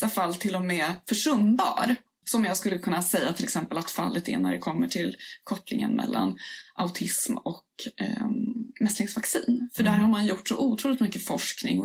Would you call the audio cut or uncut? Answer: uncut